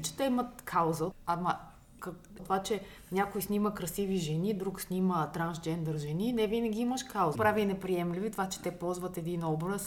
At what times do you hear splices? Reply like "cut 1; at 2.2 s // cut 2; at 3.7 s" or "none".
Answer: cut 1; at 1.1 s // cut 2; at 2.4 s // cut 3; at 7.4 s